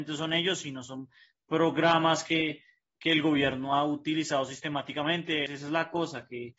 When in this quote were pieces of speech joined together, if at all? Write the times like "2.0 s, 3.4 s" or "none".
5.5 s